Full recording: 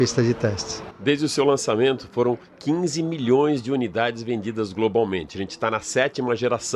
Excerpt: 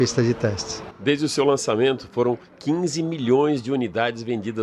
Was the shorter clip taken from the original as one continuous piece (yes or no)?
yes